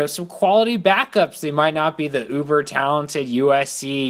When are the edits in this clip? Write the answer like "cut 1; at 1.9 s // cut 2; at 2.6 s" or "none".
none